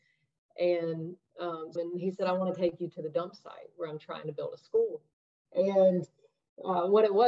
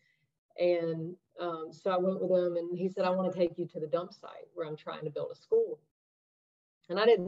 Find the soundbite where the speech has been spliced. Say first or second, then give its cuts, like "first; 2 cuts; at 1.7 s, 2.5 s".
first; 2 cuts; at 1.8 s, 5.5 s